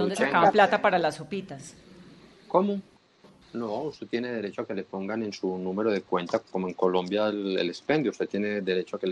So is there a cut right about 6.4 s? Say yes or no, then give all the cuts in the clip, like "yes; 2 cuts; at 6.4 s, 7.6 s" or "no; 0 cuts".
yes; 2 cuts; at 3.4 s, 6.4 s